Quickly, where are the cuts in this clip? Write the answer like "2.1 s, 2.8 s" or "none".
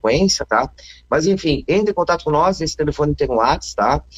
none

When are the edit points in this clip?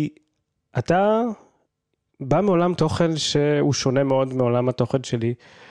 none

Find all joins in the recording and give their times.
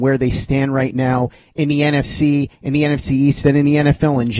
none

